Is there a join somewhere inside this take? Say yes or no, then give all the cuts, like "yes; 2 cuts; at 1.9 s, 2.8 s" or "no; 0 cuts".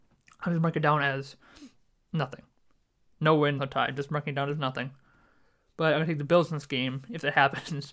yes; 1 cut; at 3.6 s